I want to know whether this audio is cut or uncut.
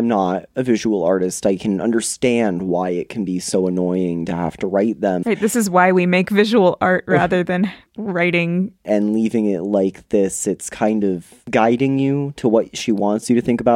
cut